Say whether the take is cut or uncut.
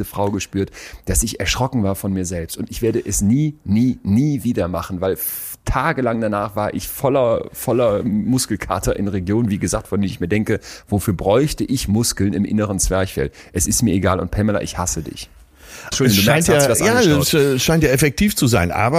cut